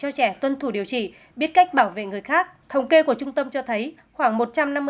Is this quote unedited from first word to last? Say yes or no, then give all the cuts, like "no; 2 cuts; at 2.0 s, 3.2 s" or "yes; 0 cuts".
no; 1 cut; at 2.6 s